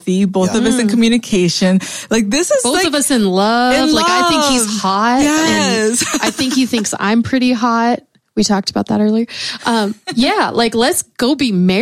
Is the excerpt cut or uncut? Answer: uncut